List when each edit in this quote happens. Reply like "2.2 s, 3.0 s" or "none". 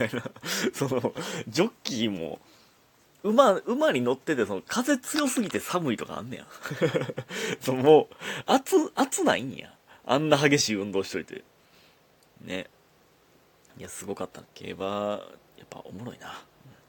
14.4 s

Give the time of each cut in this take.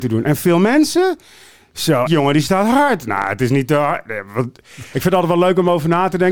2.1 s, 4.9 s

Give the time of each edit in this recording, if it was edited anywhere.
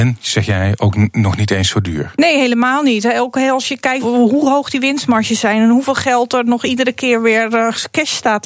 2.1 s, 4.0 s

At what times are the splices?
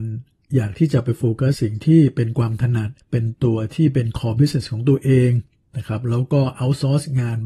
1.5 s, 3.0 s

